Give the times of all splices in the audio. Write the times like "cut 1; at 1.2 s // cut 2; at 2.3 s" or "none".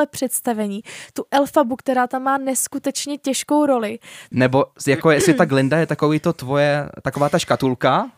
cut 1; at 4.3 s